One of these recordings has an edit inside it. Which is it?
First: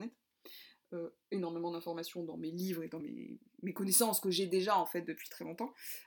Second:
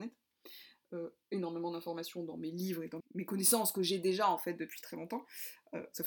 second; 1 cut; at 3.0 s

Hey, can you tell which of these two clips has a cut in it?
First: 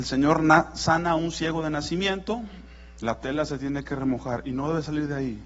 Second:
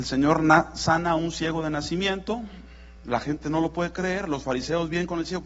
first; 1 cut; at 3.0 s

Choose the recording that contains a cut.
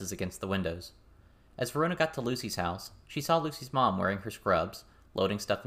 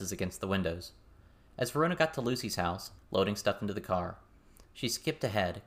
second; 1 cut; at 3.0 s

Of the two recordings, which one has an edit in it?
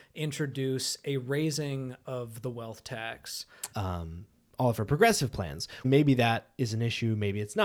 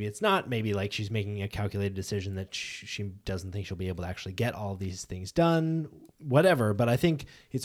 first; 2 cuts; at 3.7 s, 5.8 s

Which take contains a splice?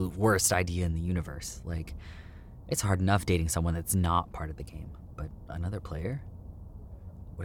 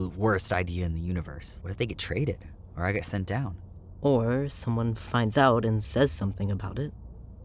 second; 1 cut; at 1.6 s

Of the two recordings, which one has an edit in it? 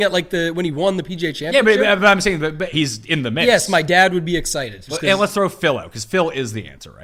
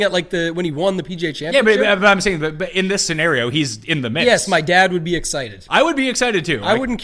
first; 2 cuts; at 2.7 s, 4.9 s

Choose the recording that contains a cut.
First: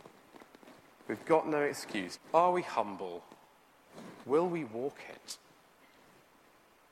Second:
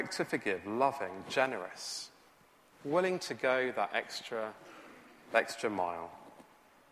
first; 2 cuts; at 2.2 s, 4.2 s

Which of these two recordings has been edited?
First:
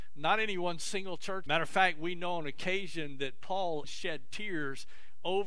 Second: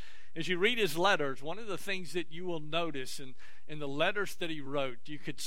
first; 2 cuts; at 1.5 s, 3.8 s

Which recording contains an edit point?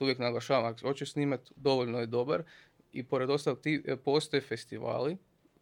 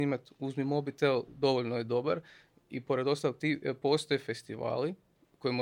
first; 1 cut; at 1.6 s

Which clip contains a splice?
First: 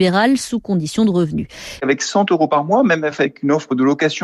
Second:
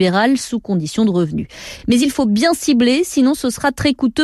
first; 1 cut; at 1.8 s

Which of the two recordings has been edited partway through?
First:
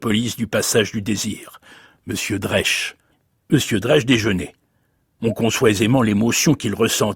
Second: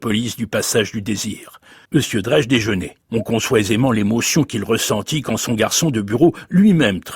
second; 2 cuts; at 1.8 s, 3.0 s

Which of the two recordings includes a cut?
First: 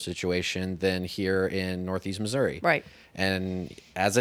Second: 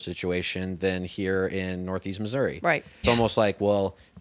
second; 1 cut; at 3.0 s

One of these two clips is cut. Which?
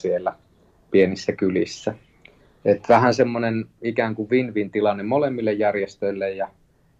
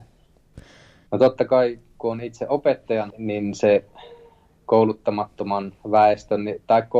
second; 2 cuts; at 1.1 s, 3.1 s

